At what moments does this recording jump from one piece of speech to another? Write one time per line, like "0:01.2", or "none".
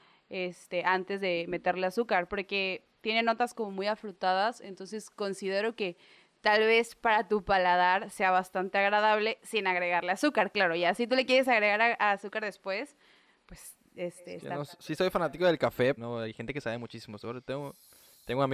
0:16.0

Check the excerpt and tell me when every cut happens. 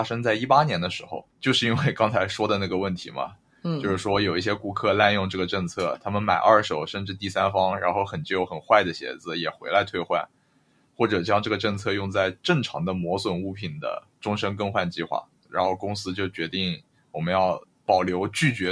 0:01.3

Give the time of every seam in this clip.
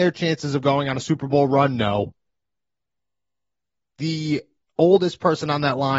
none

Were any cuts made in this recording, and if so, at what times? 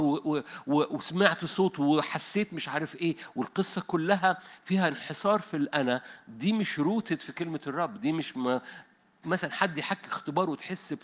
0:09.2

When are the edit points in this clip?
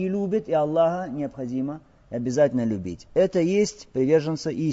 none

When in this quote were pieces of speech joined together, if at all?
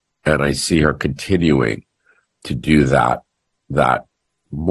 none

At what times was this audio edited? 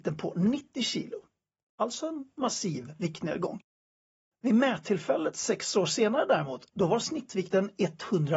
none

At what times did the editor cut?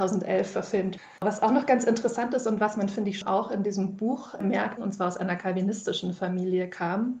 0:03.2
0:04.8

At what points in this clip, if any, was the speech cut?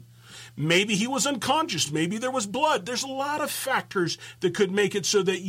none

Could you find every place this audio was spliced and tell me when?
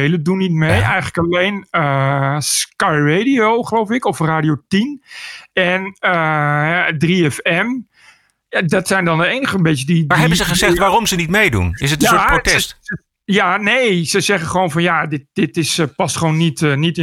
none

